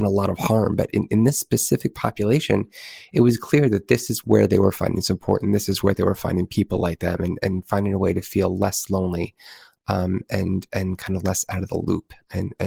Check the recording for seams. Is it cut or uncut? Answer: uncut